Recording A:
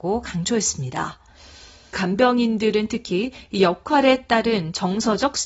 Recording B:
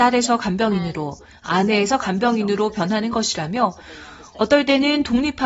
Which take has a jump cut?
A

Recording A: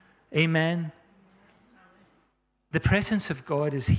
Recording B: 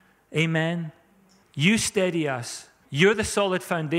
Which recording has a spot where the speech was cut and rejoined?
B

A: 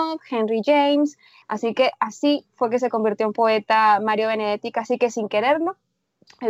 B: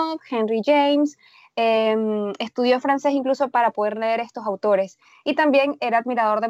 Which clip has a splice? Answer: A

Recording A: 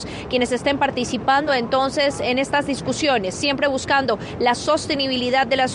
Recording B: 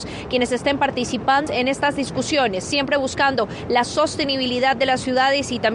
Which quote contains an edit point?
B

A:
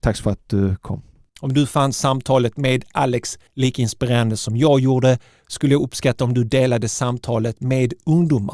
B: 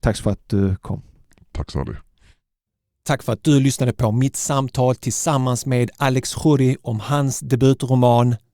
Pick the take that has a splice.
A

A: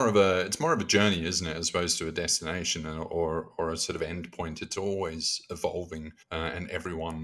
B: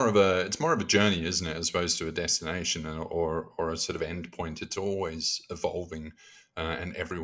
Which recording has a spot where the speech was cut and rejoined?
A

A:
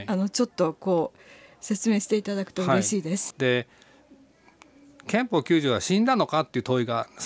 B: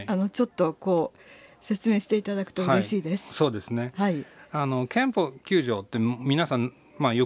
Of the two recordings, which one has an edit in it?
A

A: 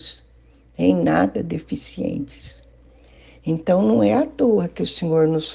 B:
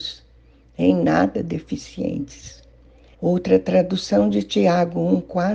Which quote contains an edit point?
B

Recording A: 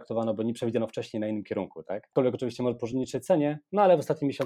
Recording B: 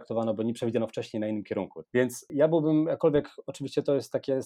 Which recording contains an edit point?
B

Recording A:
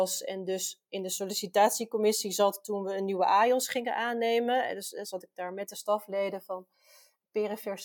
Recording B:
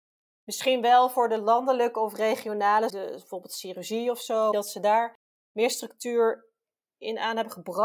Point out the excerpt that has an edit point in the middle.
B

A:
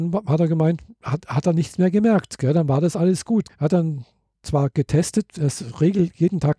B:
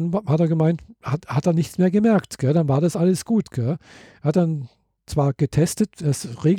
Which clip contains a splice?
A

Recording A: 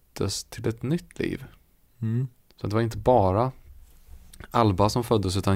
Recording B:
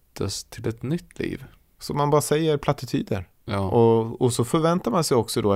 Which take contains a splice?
B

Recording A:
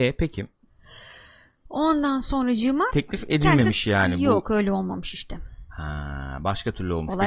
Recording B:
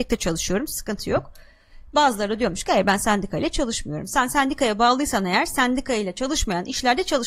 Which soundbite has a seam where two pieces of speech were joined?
A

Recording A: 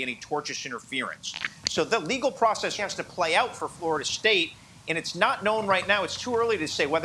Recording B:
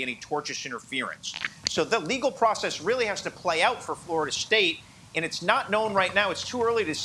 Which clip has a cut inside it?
A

